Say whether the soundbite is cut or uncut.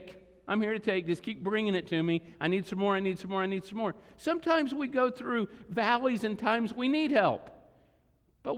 uncut